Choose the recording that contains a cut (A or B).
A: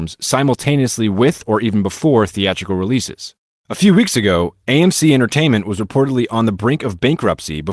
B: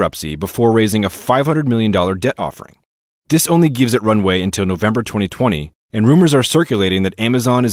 A